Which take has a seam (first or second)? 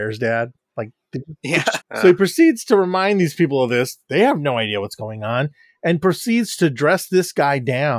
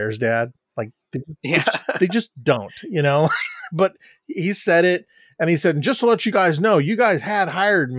first